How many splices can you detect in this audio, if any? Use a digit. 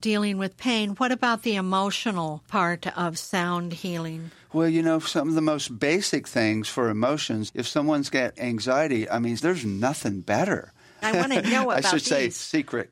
3